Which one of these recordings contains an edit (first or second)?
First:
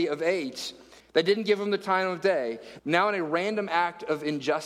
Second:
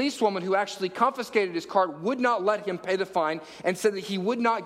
first